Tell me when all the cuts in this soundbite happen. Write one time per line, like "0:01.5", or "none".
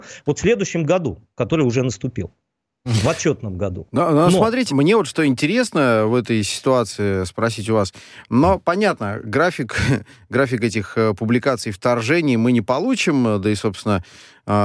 0:04.7